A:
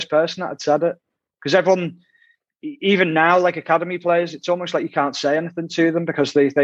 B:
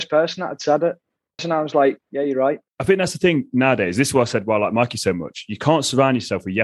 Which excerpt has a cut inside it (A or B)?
B